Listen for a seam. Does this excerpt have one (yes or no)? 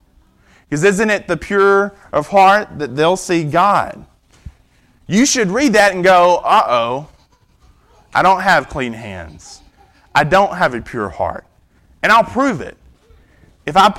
no